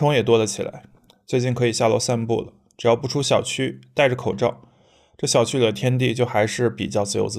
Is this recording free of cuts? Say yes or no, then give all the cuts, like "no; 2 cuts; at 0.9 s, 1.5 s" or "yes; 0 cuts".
yes; 0 cuts